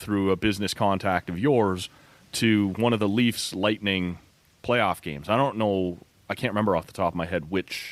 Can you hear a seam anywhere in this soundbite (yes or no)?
no